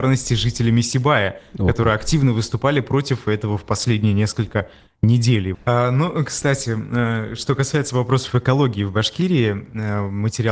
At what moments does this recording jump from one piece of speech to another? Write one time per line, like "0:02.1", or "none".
0:05.5